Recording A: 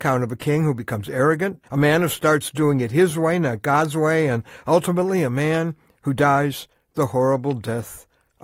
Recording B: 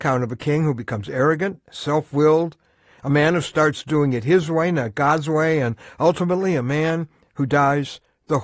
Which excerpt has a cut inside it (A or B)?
A